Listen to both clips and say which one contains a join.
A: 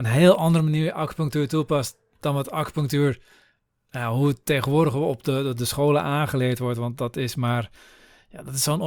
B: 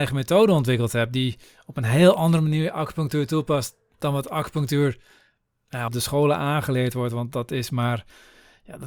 B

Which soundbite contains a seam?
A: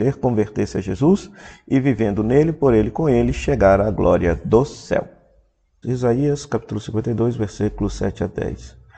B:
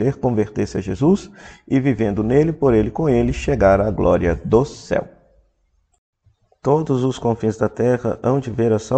A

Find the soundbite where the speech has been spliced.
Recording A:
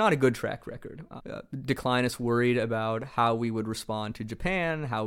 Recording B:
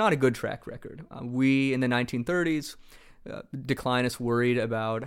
A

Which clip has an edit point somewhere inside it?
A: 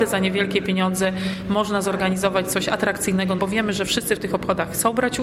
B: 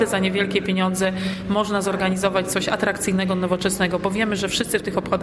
A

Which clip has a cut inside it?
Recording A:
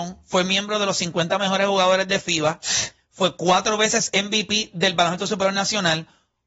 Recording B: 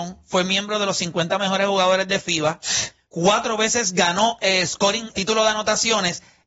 B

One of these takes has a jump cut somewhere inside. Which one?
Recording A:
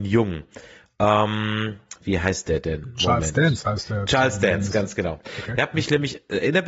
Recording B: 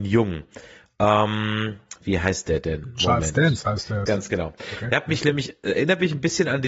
B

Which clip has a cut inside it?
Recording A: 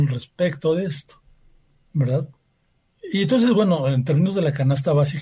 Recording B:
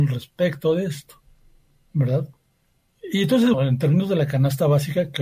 B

